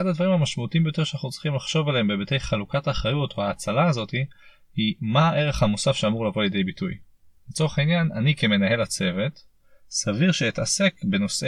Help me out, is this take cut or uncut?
uncut